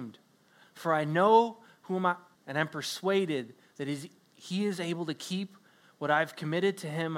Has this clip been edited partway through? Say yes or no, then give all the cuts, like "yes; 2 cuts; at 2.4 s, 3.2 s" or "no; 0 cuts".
yes; 1 cut; at 2.4 s